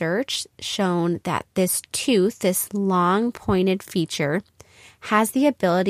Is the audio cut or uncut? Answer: uncut